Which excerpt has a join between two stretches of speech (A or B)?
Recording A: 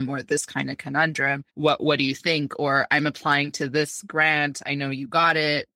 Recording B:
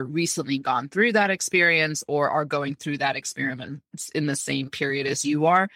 A